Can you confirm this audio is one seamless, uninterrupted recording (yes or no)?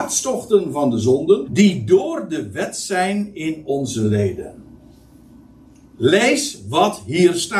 no